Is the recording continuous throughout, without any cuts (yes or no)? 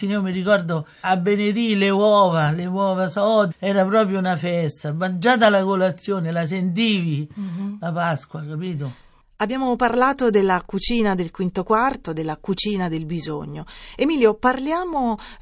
no